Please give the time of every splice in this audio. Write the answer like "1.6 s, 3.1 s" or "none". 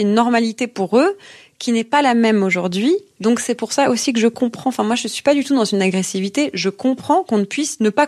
3.1 s